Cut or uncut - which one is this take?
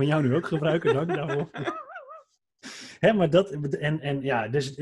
uncut